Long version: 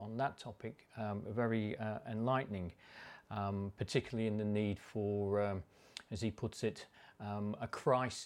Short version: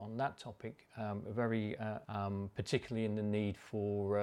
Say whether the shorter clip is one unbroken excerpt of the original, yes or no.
no